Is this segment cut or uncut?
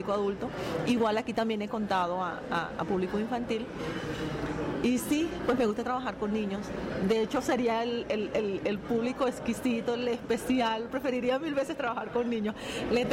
uncut